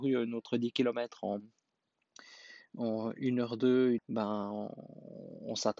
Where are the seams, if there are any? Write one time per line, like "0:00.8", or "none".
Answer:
0:04.0